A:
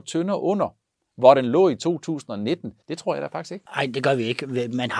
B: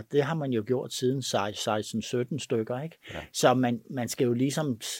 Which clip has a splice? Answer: A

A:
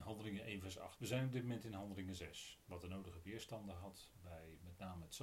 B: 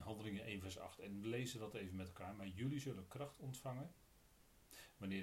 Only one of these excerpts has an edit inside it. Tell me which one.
A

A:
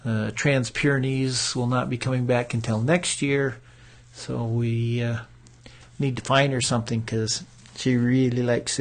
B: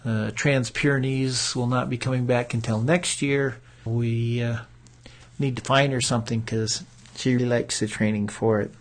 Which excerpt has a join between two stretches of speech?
B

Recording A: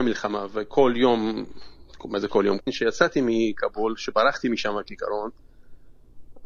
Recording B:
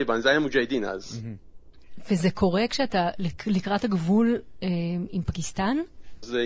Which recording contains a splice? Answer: A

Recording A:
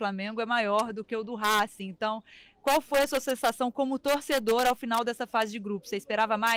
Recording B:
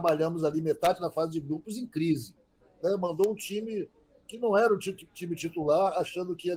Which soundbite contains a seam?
B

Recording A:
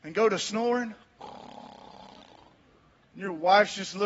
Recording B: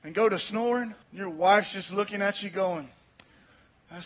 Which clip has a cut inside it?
B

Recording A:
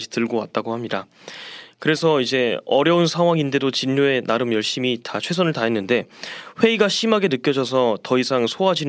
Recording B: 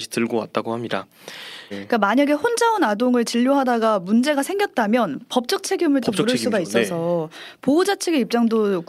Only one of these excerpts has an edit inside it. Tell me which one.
B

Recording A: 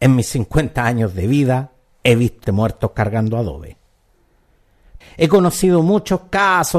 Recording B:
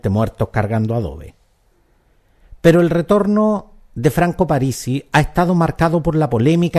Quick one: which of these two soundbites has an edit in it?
A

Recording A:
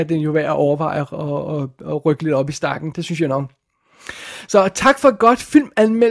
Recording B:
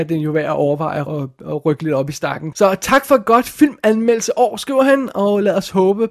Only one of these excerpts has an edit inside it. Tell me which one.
B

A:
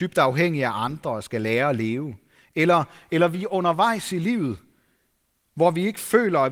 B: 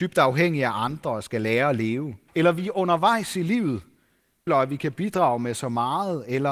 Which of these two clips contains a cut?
B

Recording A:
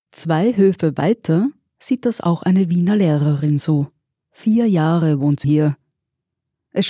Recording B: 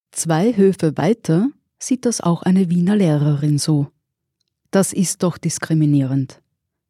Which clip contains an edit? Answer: A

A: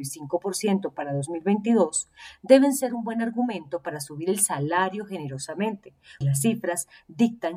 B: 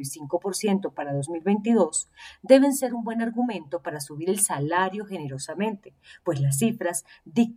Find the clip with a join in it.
A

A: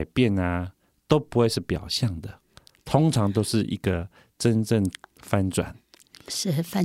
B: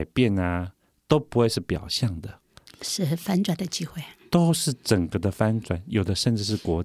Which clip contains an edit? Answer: B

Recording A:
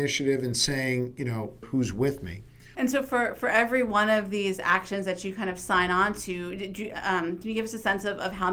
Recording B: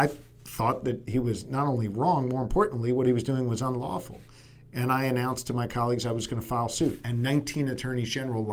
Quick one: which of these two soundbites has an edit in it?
A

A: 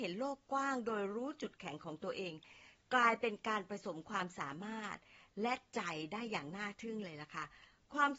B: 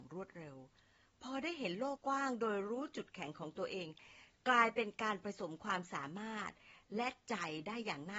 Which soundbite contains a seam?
B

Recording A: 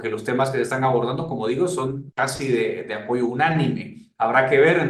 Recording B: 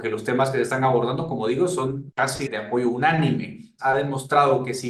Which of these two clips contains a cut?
B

